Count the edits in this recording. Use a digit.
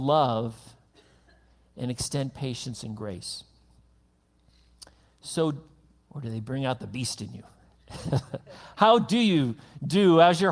1